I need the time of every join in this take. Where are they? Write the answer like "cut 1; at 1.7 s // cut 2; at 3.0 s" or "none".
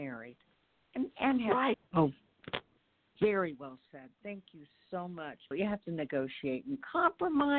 cut 1; at 1.7 s // cut 2; at 5.5 s

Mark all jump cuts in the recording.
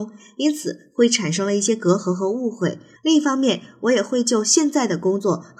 cut 1; at 3.0 s

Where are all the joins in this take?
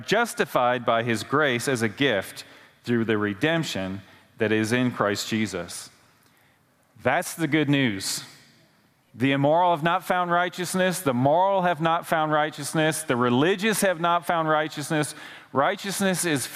none

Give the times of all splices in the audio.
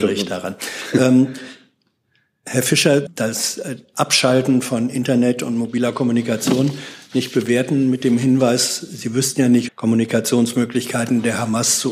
cut 1; at 3.1 s // cut 2; at 9.7 s

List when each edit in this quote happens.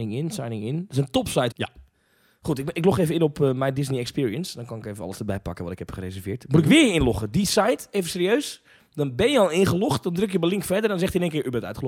cut 1; at 1.5 s

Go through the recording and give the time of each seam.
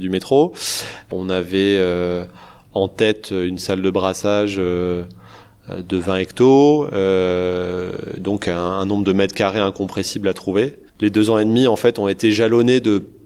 cut 1; at 10.9 s

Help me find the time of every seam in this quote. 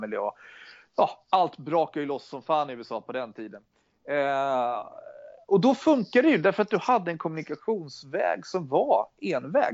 none

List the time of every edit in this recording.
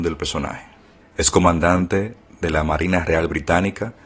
cut 1; at 1.0 s

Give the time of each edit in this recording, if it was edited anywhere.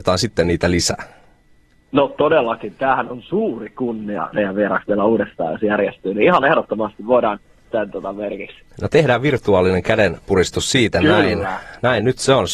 cut 1; at 4.3 s // cut 2; at 7.6 s

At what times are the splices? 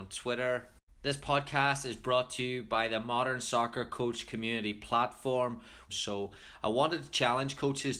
cut 1; at 5.9 s

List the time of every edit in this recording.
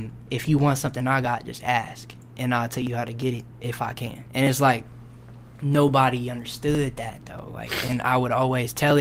cut 1; at 4.3 s

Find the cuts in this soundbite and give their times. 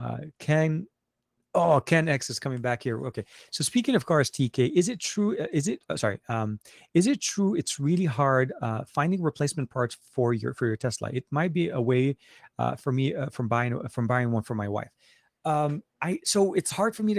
cut 1; at 15.9 s

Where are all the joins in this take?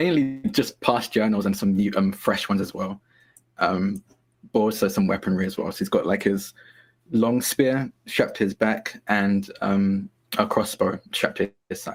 none

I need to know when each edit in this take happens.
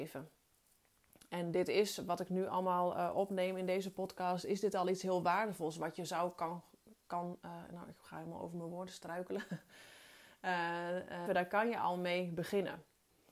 cut 1; at 11.3 s

